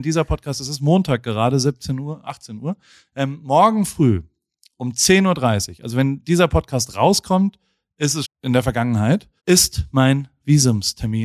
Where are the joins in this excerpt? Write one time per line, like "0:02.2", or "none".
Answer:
0:08.2
0:09.4